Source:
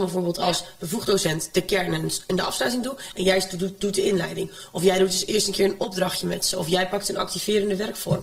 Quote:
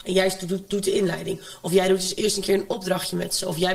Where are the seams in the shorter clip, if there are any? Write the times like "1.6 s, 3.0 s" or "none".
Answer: none